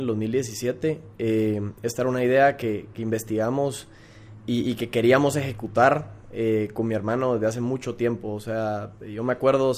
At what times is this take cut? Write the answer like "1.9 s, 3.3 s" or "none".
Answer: none

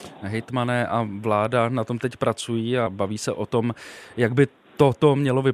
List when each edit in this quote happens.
2.9 s

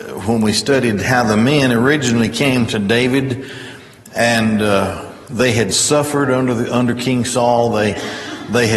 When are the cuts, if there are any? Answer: none

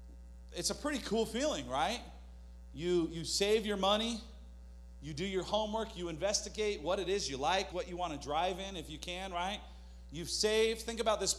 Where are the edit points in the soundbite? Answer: 7.7 s

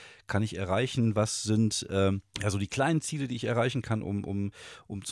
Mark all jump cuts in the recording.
2.3 s

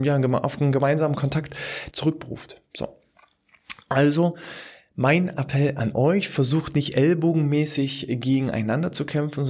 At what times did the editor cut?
1.9 s

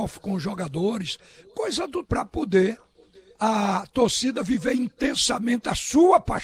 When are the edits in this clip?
2.0 s

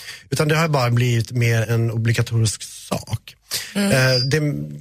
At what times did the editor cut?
1.6 s

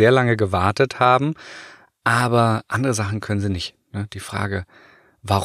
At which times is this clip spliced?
none

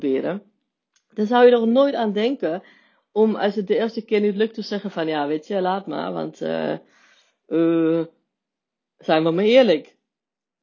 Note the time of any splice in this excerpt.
8.8 s

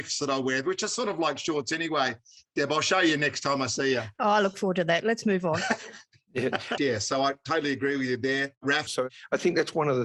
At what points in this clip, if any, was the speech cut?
6.8 s, 8.9 s

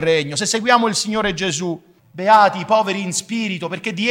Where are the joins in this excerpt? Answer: 2.0 s

